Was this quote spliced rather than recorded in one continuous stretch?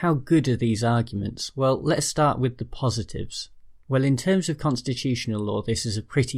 no; 0 cuts

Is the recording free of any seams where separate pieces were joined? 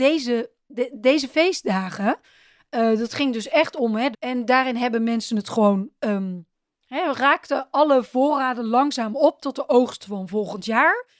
no; 1 cut; at 4.1 s

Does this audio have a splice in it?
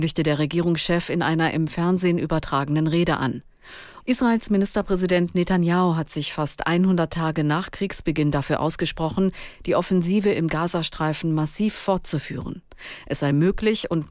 yes; 1 cut; at 4.0 s

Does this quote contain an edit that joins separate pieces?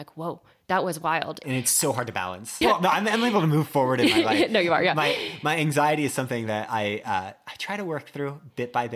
yes; 2 cuts; at 1.4 s, 2.6 s

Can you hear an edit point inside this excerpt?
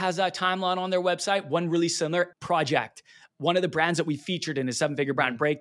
yes; 1 cut; at 2.3 s

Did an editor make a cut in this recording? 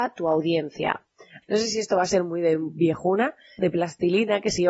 yes; 2 cuts; at 1.4 s, 3.6 s

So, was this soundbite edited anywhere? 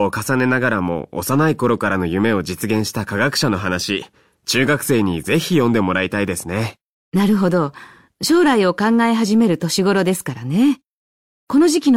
no; 0 cuts

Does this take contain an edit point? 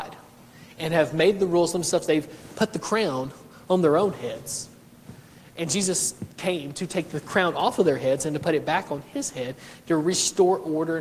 no; 0 cuts

